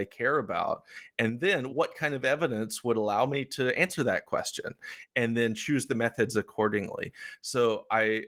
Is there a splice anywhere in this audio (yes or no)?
yes